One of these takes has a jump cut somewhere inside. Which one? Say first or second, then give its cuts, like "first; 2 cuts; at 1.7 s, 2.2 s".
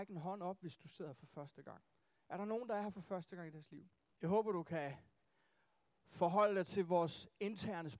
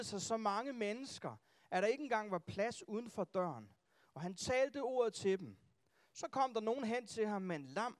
first; 1 cut; at 4.1 s